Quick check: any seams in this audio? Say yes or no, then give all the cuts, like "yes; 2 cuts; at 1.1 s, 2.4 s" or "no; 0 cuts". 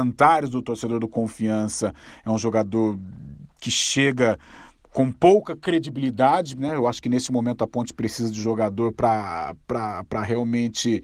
no; 0 cuts